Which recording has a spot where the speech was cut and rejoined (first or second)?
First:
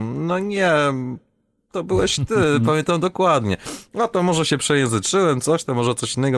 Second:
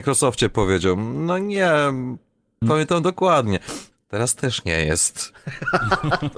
second